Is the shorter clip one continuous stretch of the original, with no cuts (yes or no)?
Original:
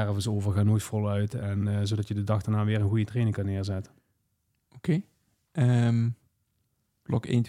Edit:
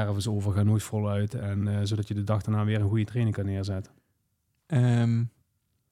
no